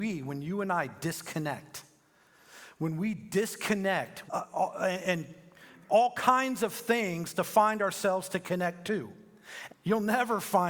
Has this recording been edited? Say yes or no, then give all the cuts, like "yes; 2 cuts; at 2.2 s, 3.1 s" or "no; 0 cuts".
yes; 2 cuts; at 4.3 s, 9.7 s